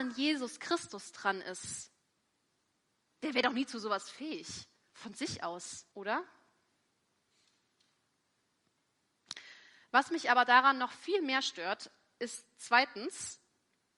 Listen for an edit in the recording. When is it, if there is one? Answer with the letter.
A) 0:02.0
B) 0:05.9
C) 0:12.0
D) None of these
B